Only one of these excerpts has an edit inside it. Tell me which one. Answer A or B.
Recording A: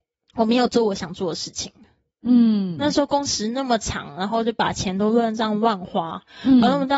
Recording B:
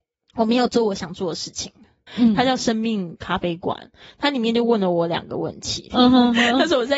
B